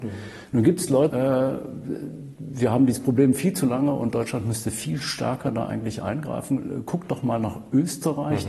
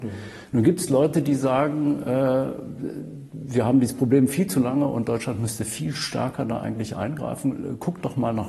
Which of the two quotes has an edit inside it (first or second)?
first